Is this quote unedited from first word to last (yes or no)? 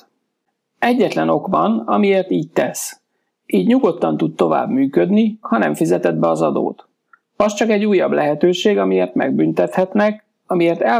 no